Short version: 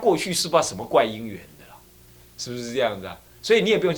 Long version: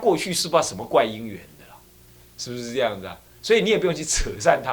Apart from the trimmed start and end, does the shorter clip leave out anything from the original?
no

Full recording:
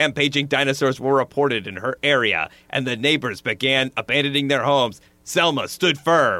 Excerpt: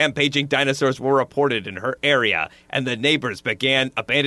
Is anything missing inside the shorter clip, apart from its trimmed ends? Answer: no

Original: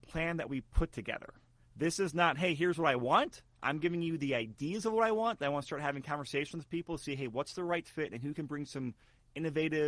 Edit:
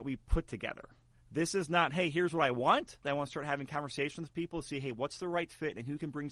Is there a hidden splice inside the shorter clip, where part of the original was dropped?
yes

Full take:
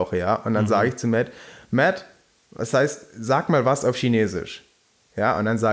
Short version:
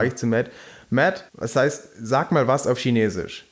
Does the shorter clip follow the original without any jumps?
no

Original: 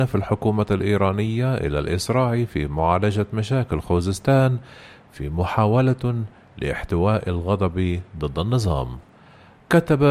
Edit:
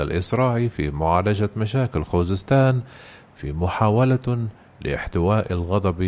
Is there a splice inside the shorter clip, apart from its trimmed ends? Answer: no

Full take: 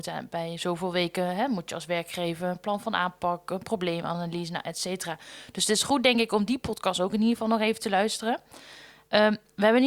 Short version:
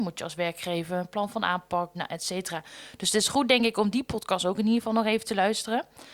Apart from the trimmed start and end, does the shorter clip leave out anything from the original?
yes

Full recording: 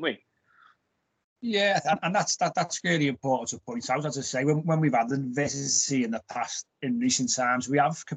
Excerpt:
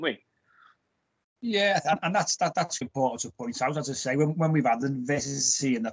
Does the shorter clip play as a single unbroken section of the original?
no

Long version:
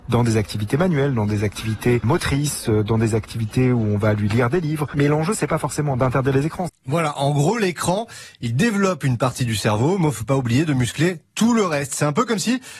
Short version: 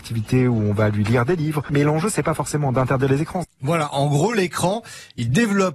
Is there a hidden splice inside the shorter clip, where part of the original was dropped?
no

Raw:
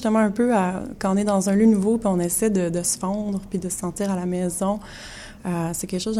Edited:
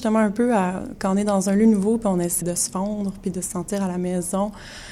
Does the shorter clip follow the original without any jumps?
no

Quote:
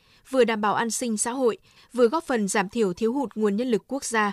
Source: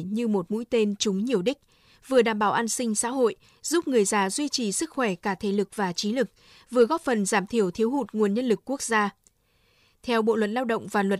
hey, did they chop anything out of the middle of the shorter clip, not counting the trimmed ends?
yes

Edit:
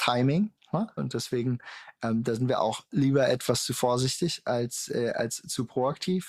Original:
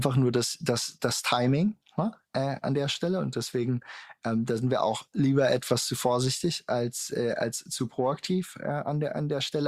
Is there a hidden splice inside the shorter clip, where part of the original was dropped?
yes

